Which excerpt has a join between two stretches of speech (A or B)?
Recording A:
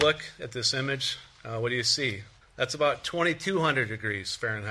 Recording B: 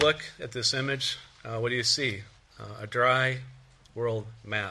A